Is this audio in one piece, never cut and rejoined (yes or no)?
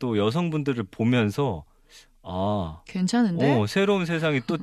yes